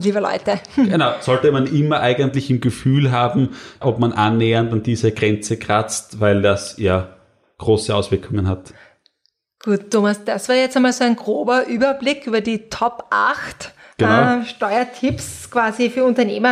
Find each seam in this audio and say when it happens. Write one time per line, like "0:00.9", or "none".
0:03.8